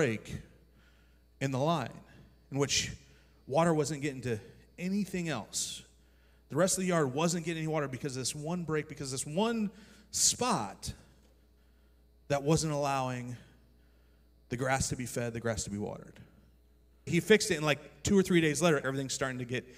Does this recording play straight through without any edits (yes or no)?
no